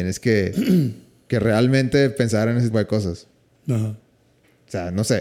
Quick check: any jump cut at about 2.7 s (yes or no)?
yes